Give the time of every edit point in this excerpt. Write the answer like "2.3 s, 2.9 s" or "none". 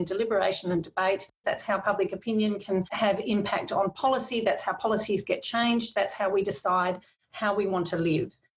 1.4 s